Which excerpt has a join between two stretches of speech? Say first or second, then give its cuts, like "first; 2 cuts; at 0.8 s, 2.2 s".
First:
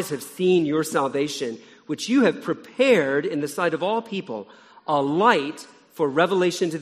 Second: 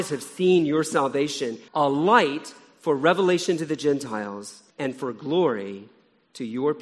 second; 2 cuts; at 1.7 s, 4.7 s